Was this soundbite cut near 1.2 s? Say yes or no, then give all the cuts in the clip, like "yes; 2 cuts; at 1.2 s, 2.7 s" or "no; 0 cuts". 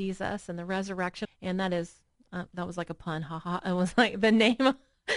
yes; 1 cut; at 1.2 s